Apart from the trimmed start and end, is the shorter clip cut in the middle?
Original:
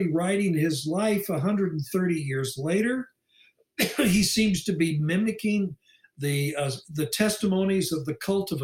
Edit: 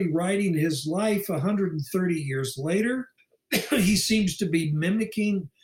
yes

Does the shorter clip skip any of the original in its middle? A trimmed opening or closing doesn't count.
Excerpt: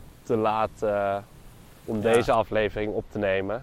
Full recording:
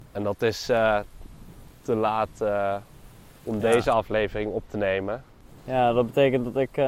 no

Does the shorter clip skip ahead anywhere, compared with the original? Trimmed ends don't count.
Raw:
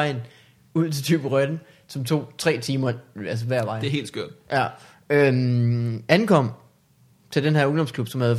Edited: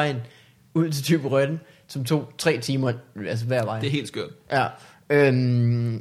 no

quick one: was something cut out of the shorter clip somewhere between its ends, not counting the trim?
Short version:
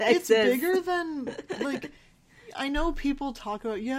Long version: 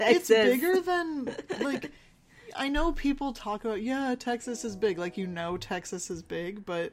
no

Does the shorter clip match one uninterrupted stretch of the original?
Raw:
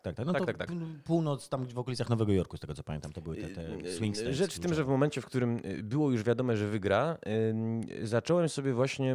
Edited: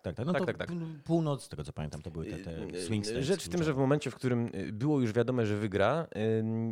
no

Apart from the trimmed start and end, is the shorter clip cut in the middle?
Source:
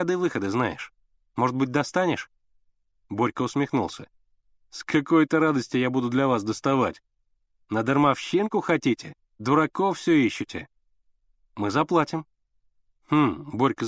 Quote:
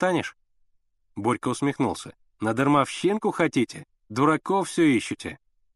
yes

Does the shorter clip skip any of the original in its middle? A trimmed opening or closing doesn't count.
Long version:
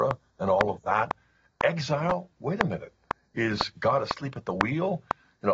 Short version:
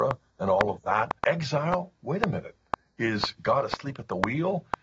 yes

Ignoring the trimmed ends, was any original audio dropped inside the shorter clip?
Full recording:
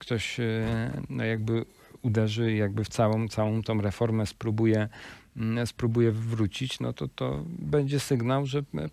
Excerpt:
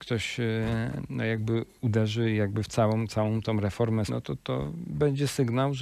yes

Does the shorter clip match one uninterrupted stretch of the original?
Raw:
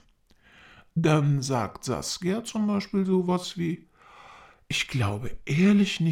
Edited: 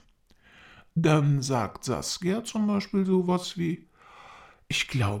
yes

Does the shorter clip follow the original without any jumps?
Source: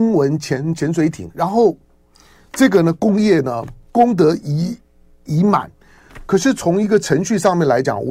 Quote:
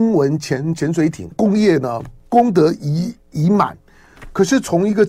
no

